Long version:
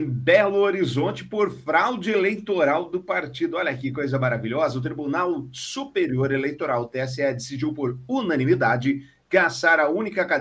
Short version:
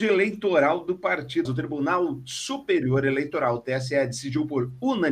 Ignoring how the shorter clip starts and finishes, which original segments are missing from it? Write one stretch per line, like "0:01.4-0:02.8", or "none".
0:03.5-0:04.7

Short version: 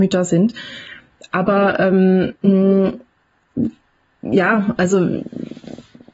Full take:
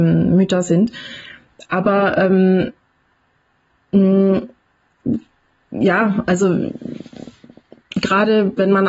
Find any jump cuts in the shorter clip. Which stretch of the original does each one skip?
0:02.7-0:03.8

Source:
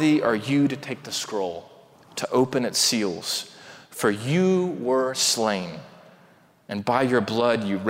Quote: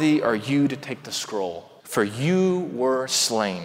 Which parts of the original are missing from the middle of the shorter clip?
0:01.8-0:03.9

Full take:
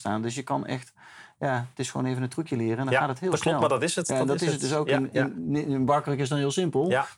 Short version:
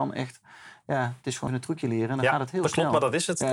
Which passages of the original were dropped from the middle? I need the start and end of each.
0:02.0-0:02.2

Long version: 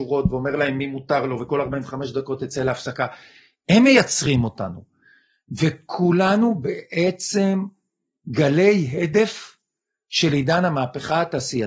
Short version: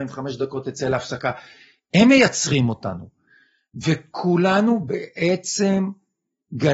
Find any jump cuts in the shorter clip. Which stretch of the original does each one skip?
none

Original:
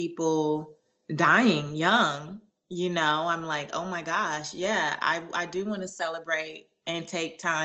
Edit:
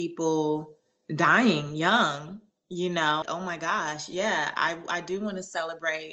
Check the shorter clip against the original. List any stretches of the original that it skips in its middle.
0:03.2-0:03.7

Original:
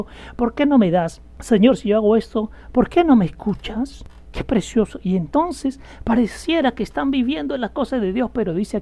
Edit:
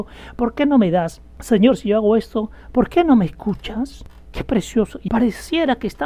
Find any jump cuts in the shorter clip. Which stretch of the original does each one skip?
0:05.1-0:06.0

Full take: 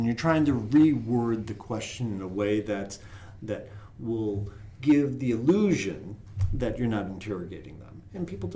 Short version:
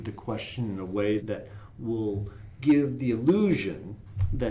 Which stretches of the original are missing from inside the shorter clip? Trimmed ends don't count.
0:02.6-0:03.4

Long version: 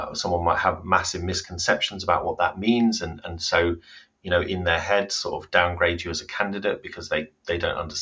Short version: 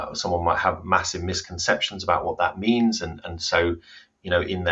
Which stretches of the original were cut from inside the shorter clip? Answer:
none

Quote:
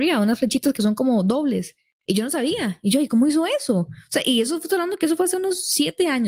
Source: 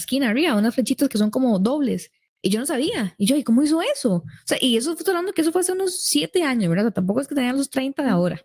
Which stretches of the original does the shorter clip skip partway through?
none

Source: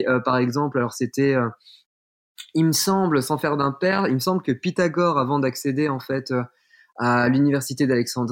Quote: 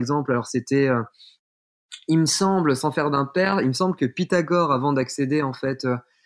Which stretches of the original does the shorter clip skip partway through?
none

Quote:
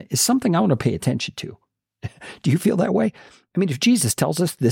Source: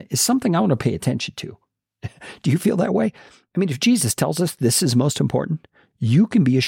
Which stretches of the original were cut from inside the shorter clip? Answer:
none

